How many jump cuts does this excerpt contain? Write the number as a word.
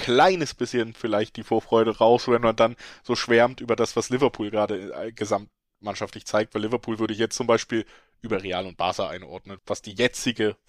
one